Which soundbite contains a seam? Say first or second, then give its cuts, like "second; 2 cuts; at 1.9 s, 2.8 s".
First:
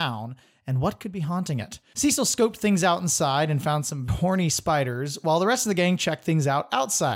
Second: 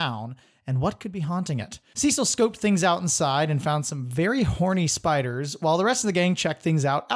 first; 1 cut; at 4.1 s